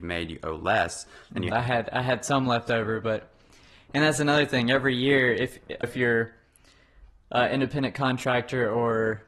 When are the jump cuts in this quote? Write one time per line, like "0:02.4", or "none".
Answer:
0:01.5
0:05.8